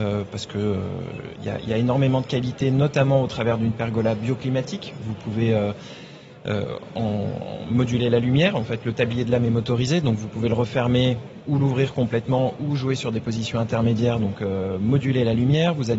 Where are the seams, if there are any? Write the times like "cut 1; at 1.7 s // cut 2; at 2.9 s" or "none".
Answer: none